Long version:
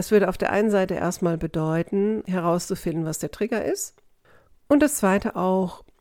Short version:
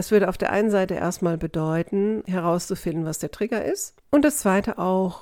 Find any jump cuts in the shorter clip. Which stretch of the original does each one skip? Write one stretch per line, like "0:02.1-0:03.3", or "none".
0:04.0-0:04.6